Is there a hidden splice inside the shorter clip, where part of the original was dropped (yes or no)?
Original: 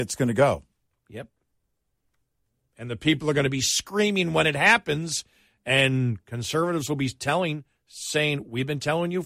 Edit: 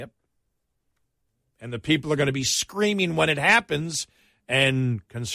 no